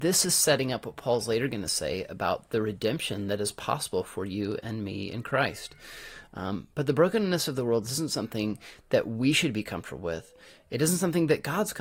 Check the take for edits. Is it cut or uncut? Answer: uncut